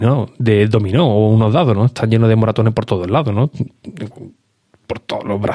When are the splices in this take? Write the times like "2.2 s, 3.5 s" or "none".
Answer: none